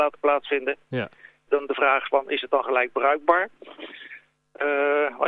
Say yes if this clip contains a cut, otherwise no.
yes